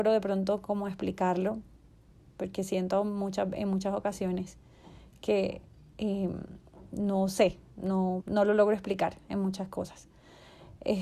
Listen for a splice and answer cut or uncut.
cut